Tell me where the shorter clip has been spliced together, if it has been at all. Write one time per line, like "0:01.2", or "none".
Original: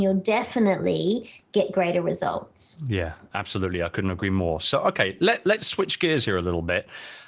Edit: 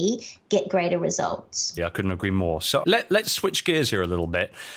0:01.8
0:02.8